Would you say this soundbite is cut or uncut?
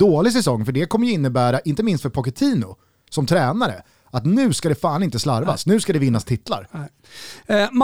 uncut